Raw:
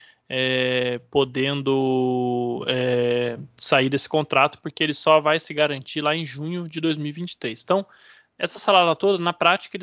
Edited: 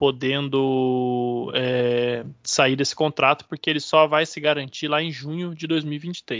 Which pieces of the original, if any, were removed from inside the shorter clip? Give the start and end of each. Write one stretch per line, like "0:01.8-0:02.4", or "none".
none